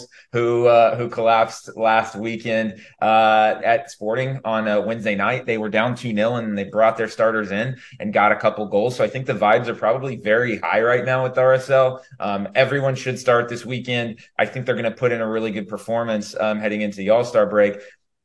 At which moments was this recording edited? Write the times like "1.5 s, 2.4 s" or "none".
3.6 s